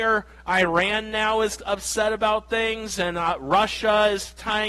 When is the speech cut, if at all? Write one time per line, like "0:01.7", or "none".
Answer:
none